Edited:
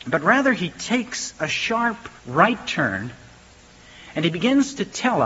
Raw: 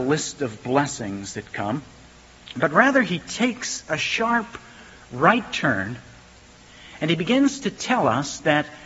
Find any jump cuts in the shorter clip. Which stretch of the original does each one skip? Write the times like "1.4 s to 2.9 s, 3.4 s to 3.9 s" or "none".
4.7 s to 5.0 s